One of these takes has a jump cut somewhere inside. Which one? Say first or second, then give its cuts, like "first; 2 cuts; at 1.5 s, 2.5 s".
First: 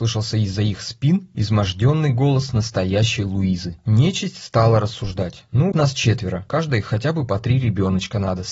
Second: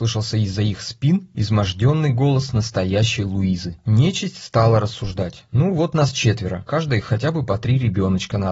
first; 1 cut; at 5.7 s